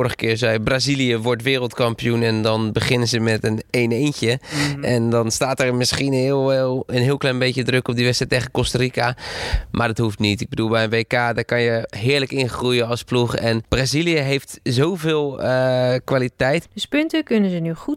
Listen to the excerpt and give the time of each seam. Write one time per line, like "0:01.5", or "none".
0:16.6